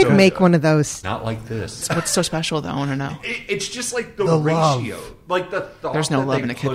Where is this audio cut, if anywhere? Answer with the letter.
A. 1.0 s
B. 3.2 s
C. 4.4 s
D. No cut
A